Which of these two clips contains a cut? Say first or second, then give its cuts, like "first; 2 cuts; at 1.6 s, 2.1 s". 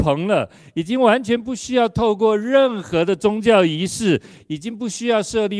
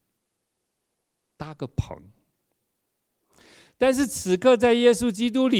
second; 1 cut; at 1.2 s